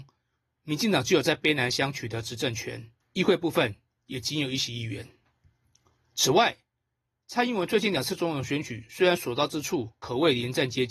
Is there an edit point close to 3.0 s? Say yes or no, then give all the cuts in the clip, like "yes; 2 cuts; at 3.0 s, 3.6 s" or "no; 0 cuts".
yes; 1 cut; at 3.0 s